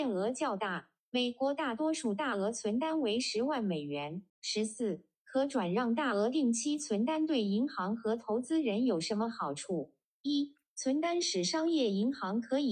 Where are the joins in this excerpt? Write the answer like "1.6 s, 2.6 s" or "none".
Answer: 4.3 s, 10.2 s